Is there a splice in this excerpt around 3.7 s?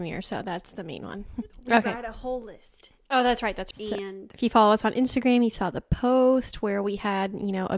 yes; 2 cuts; at 1.5 s, 3.7 s

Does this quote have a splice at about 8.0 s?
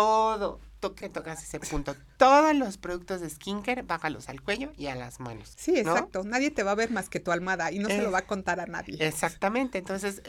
no; 2 cuts; at 1.0 s, 5.5 s

